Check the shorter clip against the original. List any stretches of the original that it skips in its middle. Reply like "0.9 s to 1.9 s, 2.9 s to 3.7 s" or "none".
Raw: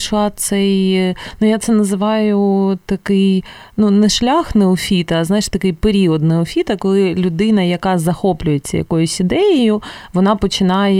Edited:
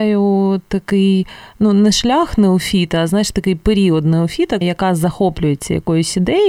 6.8 s to 7.6 s